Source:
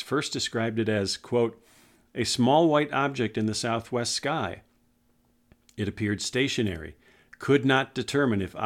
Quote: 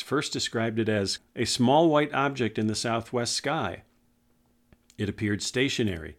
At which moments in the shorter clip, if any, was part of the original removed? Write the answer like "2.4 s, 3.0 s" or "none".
1.2 s

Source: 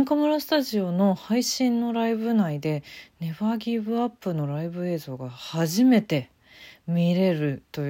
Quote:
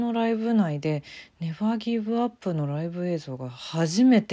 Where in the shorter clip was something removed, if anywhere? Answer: none

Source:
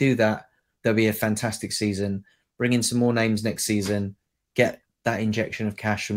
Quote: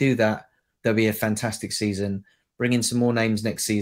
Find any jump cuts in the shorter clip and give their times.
none

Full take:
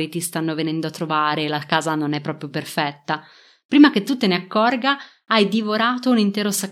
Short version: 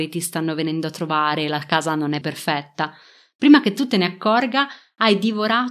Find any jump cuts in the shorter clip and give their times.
2.2 s

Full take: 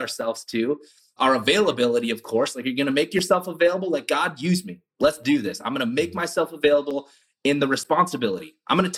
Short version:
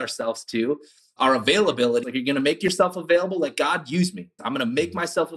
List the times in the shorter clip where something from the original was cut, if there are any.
2.0 s, 4.4 s

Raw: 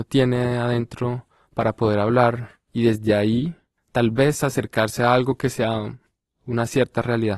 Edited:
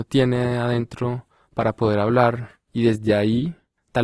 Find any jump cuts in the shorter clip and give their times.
none

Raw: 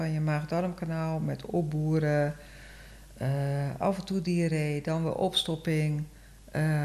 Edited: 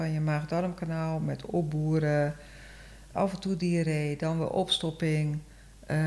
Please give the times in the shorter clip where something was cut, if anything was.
3.1 s

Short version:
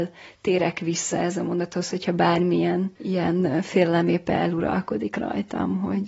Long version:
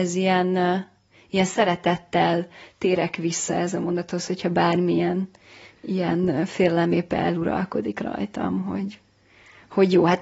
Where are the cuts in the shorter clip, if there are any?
3.0 s

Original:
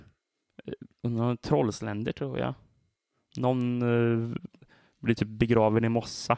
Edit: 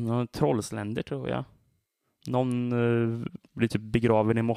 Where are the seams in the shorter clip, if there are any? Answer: 3.5 s

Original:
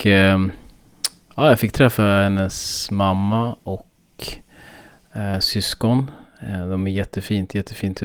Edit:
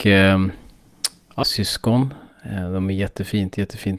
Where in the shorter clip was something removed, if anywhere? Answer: 1.4 s

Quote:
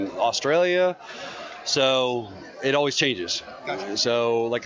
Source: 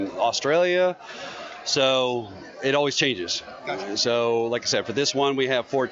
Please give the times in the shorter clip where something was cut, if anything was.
none

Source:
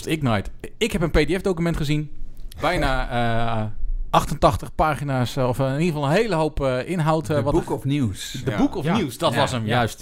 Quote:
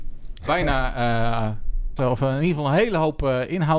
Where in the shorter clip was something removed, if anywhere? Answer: 2.0 s

